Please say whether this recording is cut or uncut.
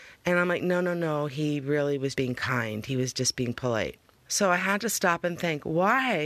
cut